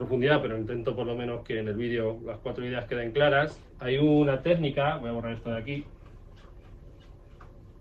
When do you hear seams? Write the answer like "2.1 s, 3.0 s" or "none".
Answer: none